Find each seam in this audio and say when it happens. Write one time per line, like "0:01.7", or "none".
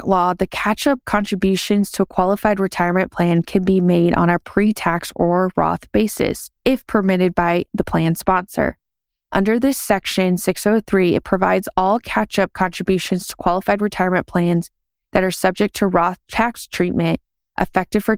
0:06.6